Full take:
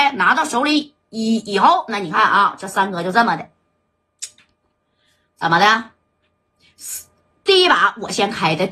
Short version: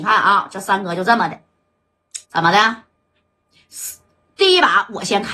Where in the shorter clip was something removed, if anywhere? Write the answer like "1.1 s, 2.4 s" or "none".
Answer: 2.2 s